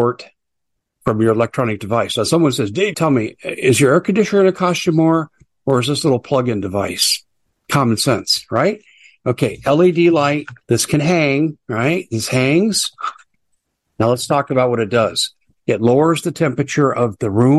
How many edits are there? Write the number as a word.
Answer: two